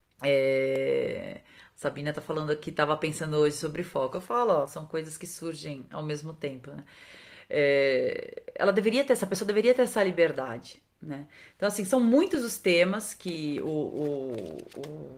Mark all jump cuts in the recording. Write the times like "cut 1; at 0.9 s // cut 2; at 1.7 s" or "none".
cut 1; at 4.7 s